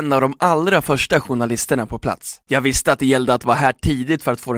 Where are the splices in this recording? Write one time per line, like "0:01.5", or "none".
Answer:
0:02.4